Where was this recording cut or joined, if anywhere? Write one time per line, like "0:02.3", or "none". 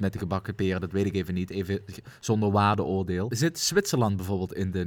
0:03.3